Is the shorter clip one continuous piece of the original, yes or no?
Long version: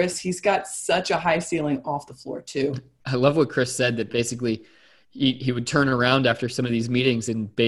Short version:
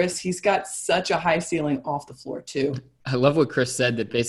yes